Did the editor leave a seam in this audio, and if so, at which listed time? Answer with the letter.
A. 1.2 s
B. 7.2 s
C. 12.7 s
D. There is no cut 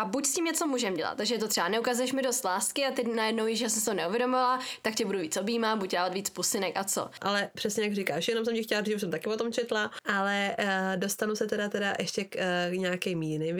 B